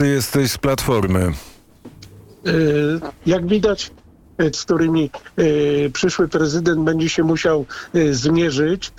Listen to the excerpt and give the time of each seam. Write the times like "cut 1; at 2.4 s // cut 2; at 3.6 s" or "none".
cut 1; at 3.2 s // cut 2; at 4.5 s